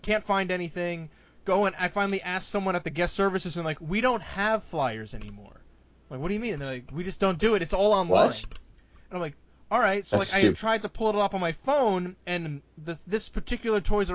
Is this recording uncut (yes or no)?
yes